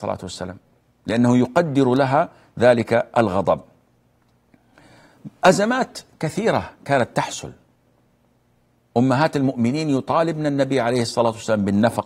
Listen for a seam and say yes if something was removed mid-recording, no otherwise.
no